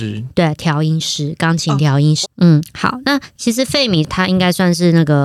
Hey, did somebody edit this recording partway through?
yes; 1 cut; at 2.2 s

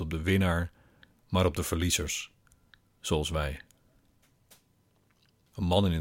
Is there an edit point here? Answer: no; 0 cuts

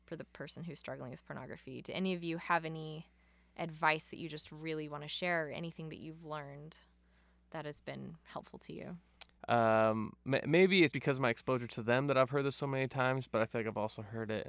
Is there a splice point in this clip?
yes; 2 cuts; at 9.4 s, 10.9 s

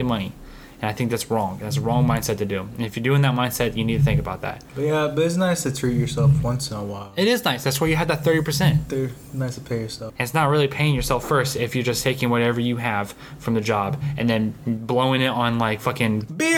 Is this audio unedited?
no; 1 cut; at 10.1 s

